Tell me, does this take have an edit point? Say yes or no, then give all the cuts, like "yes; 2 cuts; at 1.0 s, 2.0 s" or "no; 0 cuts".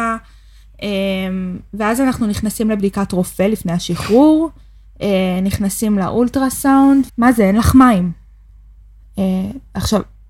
yes; 1 cut; at 7.1 s